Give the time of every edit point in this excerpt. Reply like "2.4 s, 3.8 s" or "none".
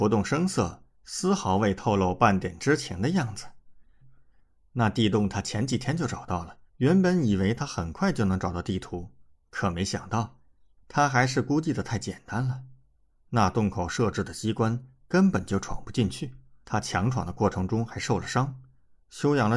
4.0 s, 6.7 s, 16.6 s